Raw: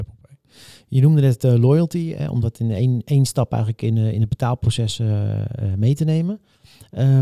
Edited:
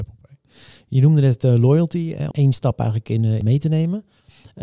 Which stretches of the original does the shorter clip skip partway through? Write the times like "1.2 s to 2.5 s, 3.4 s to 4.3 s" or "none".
2.3 s to 3.0 s, 4.1 s to 5.8 s